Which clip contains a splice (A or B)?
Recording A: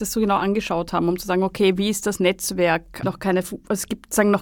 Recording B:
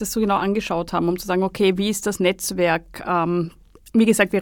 A